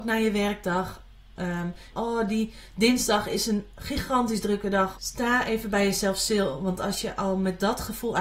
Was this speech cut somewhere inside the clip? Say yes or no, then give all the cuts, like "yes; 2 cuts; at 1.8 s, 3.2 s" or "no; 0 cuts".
yes; 2 cuts; at 1.9 s, 4.9 s